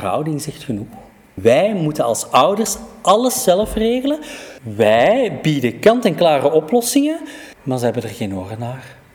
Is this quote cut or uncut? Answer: uncut